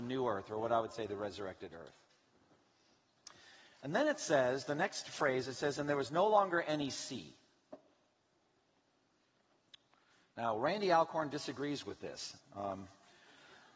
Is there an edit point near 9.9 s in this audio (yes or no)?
no